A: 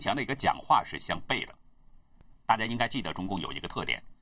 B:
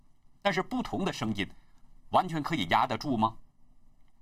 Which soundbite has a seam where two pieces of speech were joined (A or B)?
A